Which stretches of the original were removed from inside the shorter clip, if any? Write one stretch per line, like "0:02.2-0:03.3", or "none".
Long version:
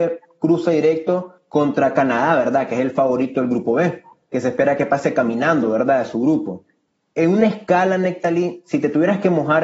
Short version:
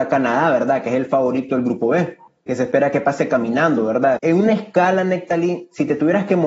0:06.0-0:07.1